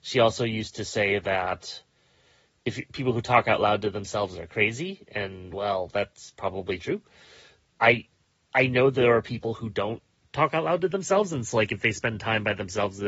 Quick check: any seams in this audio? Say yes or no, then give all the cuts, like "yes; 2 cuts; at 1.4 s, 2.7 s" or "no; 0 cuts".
no; 0 cuts